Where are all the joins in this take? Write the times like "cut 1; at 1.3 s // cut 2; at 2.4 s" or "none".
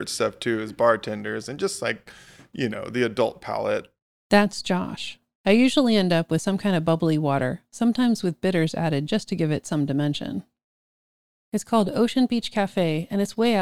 cut 1; at 5.4 s // cut 2; at 11.4 s